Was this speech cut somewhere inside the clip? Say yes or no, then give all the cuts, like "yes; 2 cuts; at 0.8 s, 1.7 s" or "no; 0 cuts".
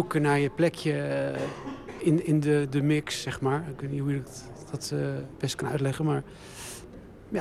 yes; 1 cut; at 2.0 s